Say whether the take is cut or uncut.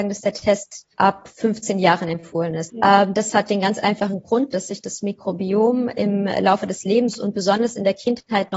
cut